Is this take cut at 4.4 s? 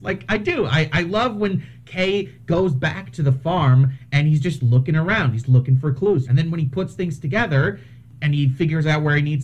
no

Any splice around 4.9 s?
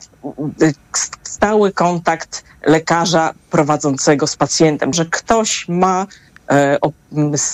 yes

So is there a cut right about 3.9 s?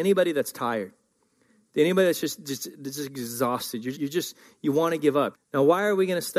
yes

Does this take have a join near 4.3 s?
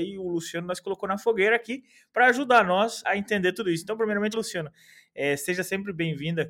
yes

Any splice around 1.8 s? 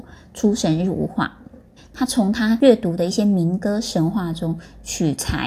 yes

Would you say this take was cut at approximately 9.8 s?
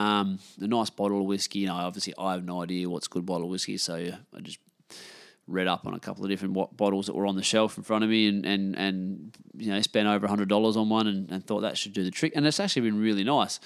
no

